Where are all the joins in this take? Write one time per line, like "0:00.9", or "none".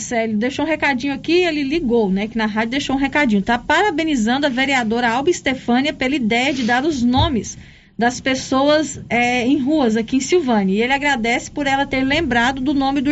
none

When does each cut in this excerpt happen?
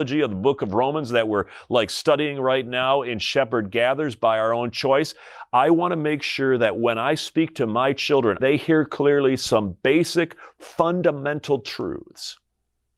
0:08.4

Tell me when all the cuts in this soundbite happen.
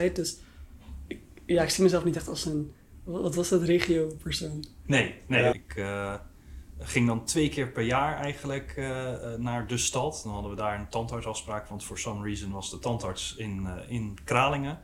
0:05.5

